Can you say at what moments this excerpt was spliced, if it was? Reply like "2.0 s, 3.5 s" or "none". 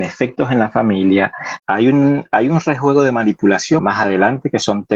1.6 s, 3.8 s